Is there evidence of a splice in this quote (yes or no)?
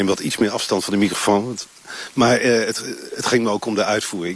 no